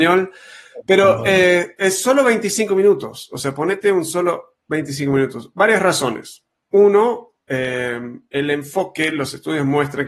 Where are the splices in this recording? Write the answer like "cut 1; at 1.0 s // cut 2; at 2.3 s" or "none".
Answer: none